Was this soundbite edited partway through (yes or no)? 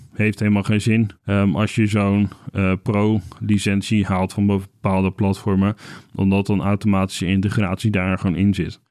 yes